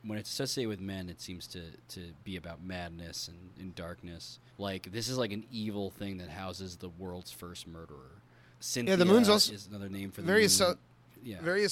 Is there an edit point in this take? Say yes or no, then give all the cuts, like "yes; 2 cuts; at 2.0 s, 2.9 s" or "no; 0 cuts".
yes; 2 cuts; at 4.5 s, 8.5 s